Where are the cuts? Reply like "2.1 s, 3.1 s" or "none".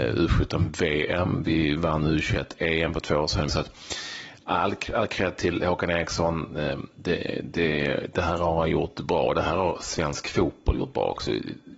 3.5 s